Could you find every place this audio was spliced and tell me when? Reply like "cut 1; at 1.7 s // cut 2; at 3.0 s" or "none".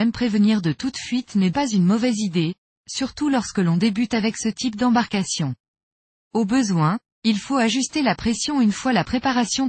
cut 1; at 1.5 s // cut 2; at 6.2 s